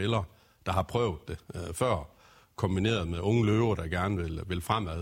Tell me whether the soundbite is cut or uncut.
uncut